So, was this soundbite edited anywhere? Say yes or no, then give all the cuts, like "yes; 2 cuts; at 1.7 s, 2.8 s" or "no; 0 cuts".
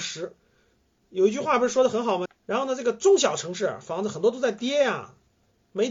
yes; 1 cut; at 2.3 s